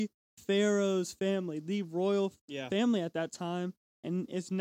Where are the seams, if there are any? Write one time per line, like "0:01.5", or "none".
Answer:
none